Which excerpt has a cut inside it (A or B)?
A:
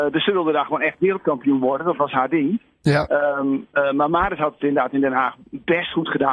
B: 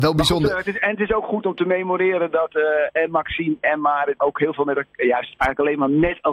B